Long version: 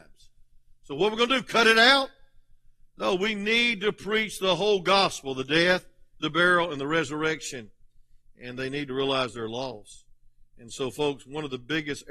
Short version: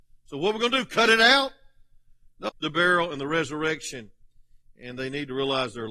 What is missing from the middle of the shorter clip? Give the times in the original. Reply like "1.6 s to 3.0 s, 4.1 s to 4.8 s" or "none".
3.1 s to 6.1 s